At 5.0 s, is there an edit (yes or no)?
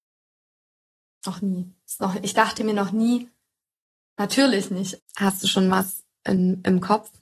yes